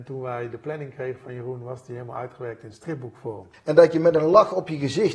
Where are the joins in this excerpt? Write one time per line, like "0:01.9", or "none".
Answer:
0:03.5

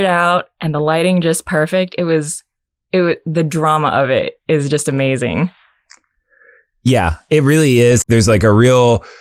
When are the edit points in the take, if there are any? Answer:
0:08.0

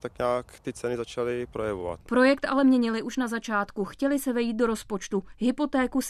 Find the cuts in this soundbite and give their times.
none

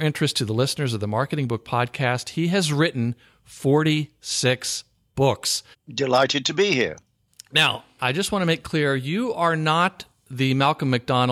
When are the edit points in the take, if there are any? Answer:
0:05.7
0:08.0

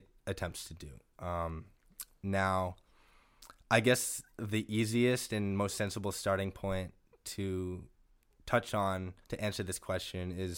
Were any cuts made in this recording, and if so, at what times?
0:09.2

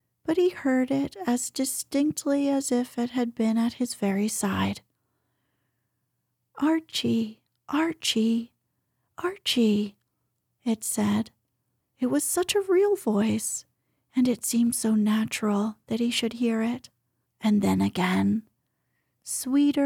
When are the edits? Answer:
0:11.8
0:17.3

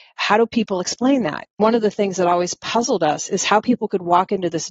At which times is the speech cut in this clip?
0:01.5

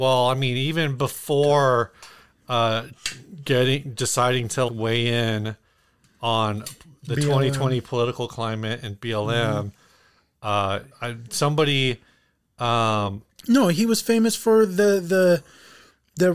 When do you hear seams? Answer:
0:04.7
0:10.9

